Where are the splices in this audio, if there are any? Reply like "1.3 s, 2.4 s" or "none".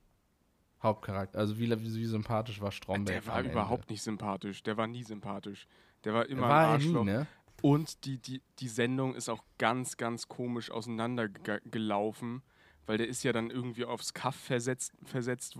none